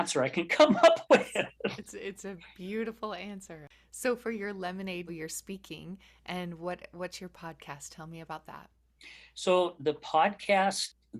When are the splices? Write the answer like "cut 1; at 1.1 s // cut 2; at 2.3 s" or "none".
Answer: cut 1; at 5.1 s